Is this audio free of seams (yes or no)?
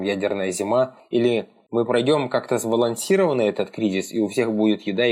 yes